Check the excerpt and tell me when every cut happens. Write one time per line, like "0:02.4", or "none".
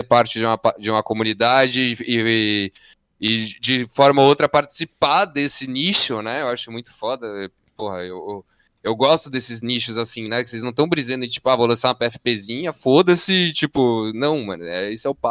none